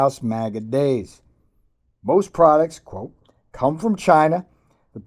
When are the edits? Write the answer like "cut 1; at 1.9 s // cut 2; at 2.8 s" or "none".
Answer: none